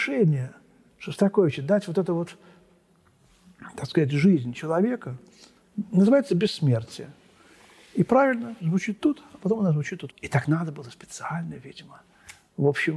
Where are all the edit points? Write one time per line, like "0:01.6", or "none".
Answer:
0:08.6
0:10.1